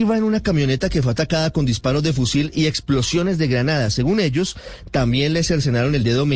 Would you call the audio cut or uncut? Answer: uncut